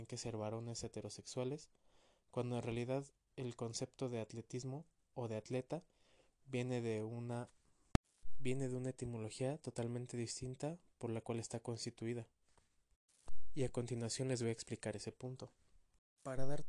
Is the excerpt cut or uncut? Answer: uncut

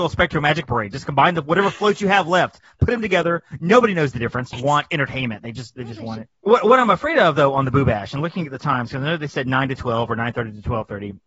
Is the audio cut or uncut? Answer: cut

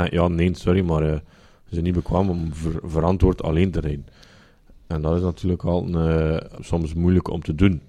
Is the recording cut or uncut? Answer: cut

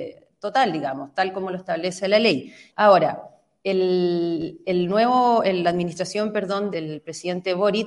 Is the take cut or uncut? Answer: cut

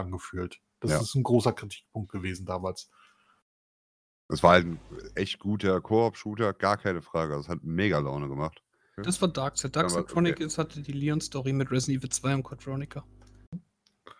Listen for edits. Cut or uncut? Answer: cut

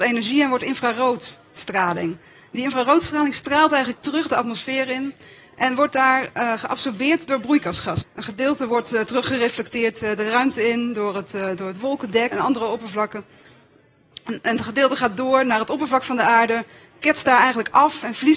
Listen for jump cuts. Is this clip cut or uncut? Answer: cut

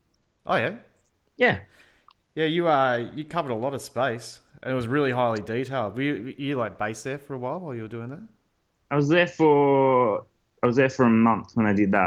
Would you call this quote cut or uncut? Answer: uncut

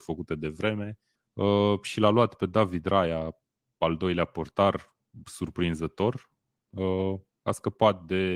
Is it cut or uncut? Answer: cut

